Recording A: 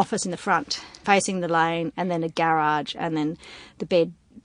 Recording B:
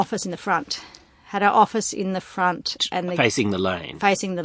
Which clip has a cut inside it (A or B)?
A